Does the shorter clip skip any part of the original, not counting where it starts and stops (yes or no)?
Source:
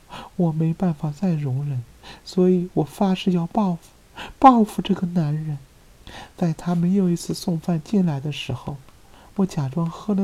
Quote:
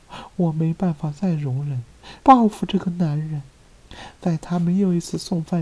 yes